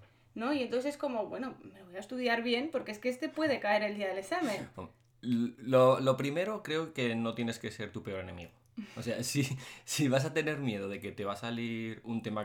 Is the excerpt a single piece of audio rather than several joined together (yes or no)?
yes